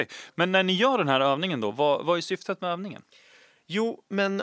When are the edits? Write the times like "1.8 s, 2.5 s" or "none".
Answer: none

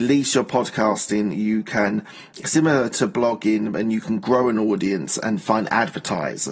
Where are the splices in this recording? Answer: none

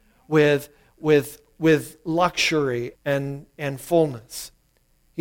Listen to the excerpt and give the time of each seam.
2.9 s

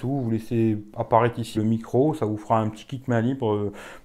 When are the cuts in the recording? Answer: 1.5 s

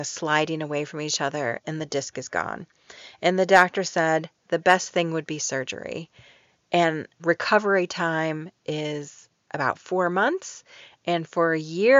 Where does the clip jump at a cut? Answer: 7.2 s

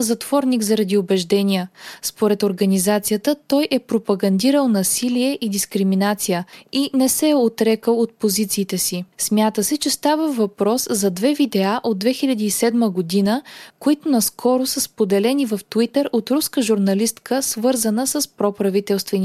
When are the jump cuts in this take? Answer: none

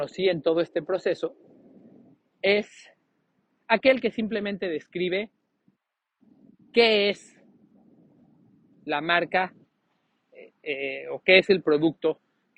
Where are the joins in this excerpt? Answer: none

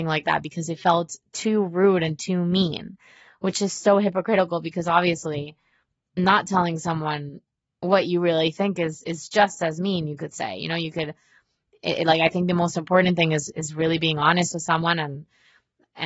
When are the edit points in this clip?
none

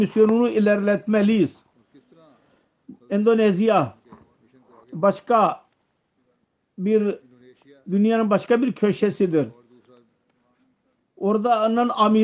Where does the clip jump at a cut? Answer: none

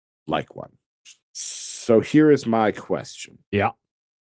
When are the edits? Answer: 1.2 s

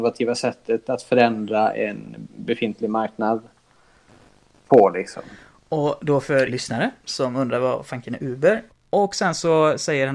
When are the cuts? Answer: 6.5 s, 8.7 s

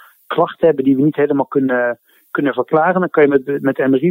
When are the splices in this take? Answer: none

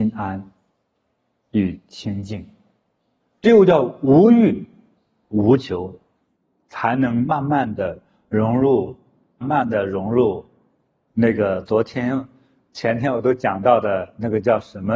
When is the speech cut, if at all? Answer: 9.4 s

